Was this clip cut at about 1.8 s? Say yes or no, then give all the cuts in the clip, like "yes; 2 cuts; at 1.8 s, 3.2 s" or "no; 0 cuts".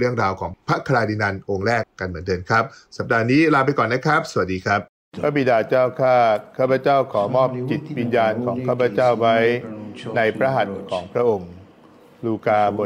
yes; 1 cut; at 1.8 s